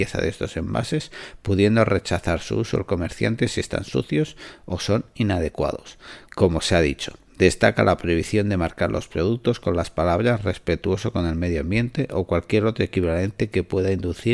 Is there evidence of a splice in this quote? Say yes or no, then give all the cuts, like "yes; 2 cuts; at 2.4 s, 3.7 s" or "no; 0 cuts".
yes; 1 cut; at 6.3 s